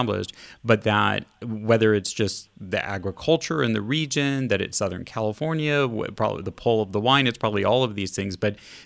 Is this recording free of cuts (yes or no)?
yes